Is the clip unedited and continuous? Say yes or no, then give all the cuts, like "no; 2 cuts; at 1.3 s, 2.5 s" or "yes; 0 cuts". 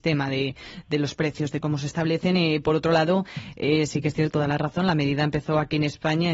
no; 1 cut; at 4.3 s